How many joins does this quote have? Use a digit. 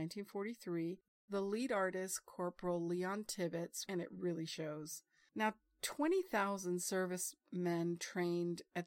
1